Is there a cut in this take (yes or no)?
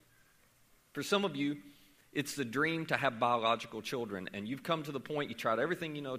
no